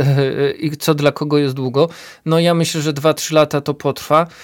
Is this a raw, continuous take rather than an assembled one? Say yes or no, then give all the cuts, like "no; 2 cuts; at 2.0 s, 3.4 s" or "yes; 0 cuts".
yes; 0 cuts